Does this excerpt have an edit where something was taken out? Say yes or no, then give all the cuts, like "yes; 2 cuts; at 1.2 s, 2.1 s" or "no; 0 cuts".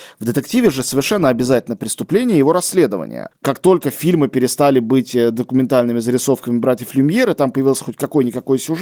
yes; 1 cut; at 3.3 s